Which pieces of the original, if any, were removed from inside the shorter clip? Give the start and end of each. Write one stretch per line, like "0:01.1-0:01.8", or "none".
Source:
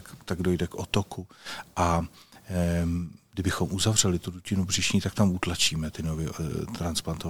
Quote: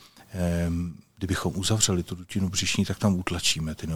none